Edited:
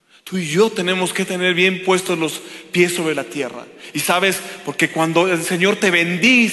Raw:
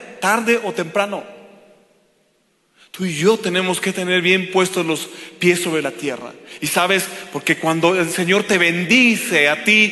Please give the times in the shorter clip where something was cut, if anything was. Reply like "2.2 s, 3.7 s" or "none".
none